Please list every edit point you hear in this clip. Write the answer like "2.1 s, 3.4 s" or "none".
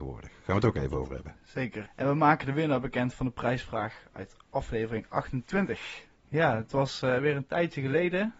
1.9 s, 6.1 s